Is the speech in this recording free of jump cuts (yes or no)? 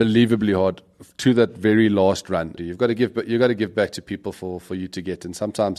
no